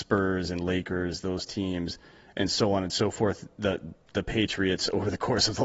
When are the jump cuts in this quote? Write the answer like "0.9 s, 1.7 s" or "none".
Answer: none